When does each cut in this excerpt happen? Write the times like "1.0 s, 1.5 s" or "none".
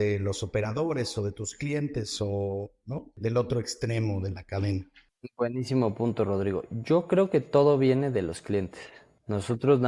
none